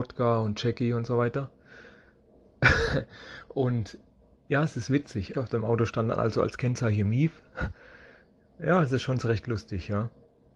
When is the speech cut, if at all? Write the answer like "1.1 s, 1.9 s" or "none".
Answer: 5.3 s